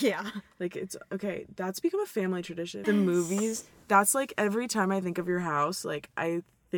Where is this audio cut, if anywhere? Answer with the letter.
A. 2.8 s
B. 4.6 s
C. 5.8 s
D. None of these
A